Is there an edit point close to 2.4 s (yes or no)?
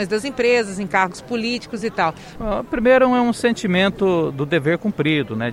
yes